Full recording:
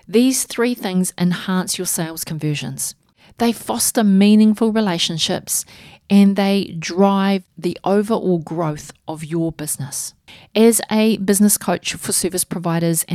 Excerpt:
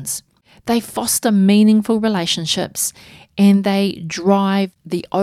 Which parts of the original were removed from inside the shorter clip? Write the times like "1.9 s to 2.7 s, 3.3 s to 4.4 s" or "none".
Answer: none